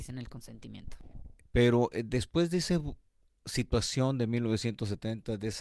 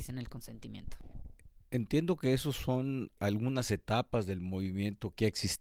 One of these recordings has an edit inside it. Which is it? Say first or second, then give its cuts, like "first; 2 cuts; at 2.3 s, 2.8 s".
first; 1 cut; at 1.4 s